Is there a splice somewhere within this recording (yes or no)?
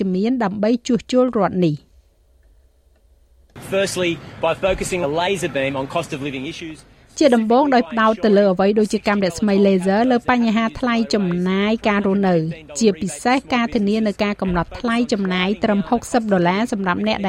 yes